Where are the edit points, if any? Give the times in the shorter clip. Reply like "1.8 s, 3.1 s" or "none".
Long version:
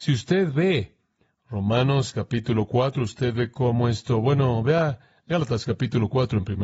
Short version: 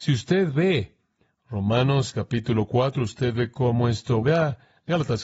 4.2 s